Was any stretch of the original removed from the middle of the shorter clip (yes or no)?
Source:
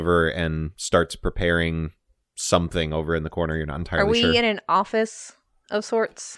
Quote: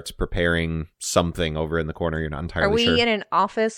yes